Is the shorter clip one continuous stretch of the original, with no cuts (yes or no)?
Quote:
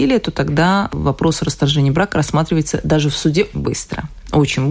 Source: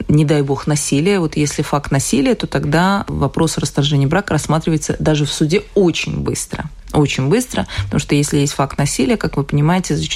no